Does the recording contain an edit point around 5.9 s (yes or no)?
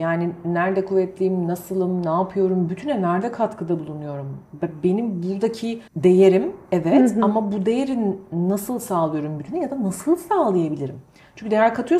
yes